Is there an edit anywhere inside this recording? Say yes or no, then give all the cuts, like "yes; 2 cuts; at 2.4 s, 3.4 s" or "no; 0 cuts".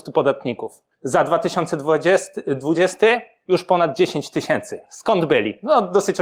yes; 2 cuts; at 0.9 s, 4.8 s